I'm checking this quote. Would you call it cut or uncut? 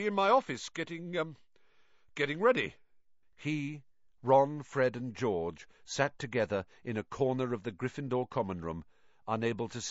cut